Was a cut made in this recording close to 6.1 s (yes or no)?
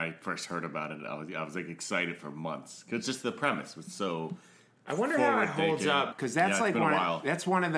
yes